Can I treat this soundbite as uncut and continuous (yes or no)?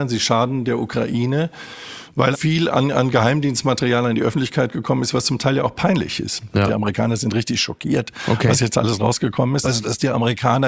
no